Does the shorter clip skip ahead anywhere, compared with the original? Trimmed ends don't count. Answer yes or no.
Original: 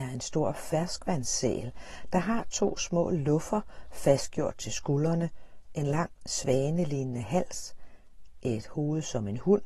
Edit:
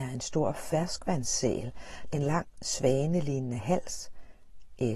yes